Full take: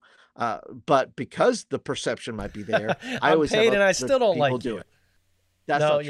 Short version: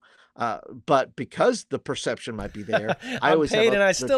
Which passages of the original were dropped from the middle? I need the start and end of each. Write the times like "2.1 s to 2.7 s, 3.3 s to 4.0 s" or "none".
none